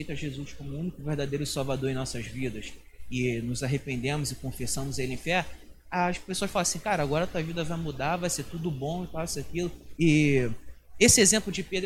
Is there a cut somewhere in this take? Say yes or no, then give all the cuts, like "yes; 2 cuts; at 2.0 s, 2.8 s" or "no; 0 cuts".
yes; 1 cut; at 10.0 s